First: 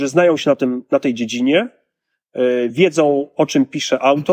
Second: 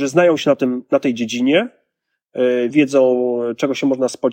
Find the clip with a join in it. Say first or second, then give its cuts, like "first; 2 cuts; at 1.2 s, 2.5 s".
second; 1 cut; at 2.7 s